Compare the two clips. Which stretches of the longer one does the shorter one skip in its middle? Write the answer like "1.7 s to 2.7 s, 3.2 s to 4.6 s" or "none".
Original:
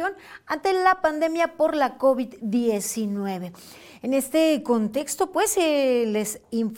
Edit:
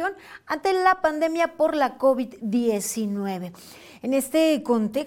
none